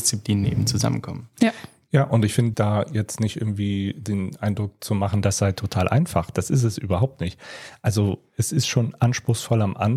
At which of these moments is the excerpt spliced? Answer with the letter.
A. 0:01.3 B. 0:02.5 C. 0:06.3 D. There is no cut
B